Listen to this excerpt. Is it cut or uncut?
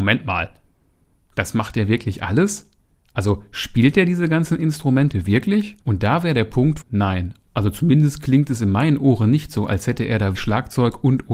cut